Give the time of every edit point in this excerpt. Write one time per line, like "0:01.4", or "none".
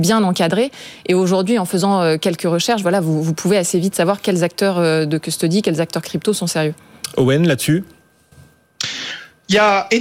none